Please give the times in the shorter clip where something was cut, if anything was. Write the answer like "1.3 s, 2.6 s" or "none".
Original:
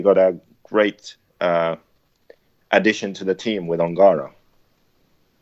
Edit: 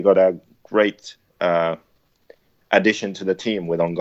none